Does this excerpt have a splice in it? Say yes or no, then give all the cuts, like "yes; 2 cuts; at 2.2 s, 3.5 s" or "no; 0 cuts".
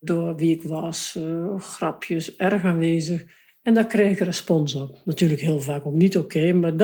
no; 0 cuts